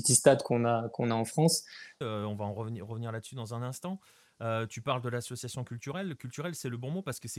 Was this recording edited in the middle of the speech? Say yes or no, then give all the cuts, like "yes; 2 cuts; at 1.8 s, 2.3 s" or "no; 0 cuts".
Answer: yes; 1 cut; at 2.0 s